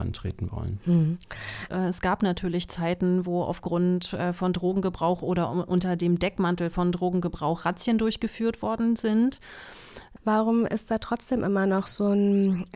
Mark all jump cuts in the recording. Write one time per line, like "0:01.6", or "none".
0:01.7
0:10.2